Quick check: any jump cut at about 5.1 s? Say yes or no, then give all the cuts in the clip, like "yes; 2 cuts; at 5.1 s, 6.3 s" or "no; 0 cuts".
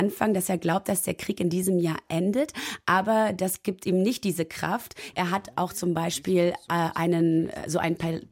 yes; 1 cut; at 5.1 s